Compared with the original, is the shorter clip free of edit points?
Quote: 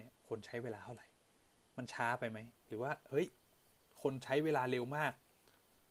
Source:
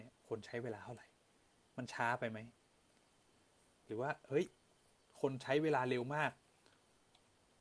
no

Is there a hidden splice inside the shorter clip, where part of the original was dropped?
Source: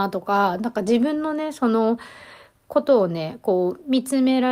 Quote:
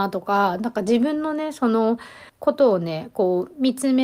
yes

